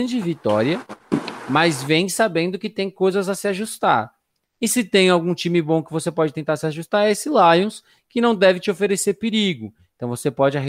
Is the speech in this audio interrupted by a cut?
no; 0 cuts

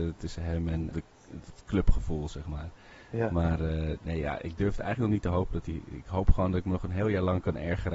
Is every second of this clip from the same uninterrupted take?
no; 1 cut; at 0.9 s

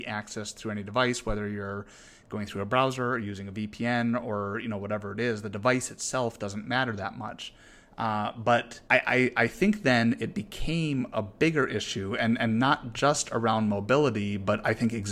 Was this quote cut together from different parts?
yes; 1 cut; at 8.8 s

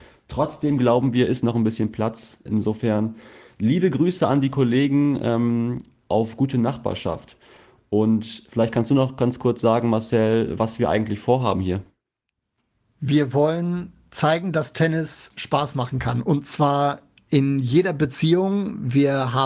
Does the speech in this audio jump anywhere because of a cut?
yes; 1 cut; at 2.5 s

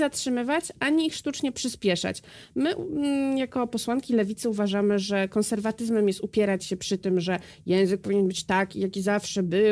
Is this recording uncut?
yes; 0 cuts

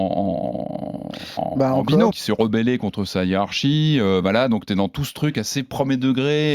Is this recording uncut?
no; 1 cut; at 2.1 s

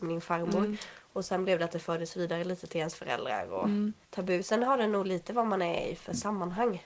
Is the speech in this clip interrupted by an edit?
yes; 1 cut; at 4.0 s

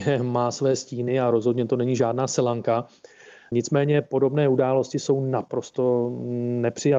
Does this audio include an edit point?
no; 0 cuts

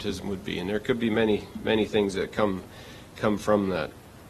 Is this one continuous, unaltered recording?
yes; 0 cuts

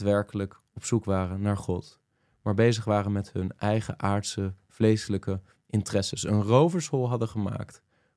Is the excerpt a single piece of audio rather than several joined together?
yes; 0 cuts

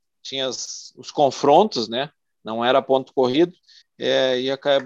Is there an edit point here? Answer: yes; 1 cut; at 3.8 s

